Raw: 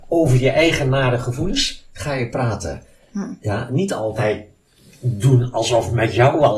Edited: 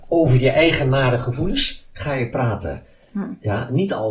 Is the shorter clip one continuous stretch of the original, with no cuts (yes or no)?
yes